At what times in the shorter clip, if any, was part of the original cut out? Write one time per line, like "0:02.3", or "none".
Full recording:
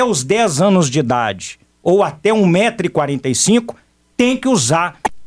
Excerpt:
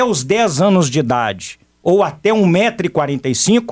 none